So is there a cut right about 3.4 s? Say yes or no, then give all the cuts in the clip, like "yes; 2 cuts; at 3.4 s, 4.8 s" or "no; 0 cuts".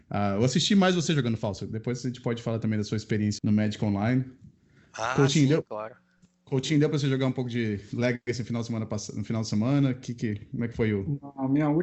yes; 1 cut; at 3.4 s